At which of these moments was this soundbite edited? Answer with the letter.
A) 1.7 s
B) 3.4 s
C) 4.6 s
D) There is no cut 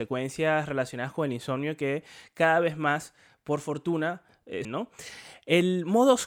C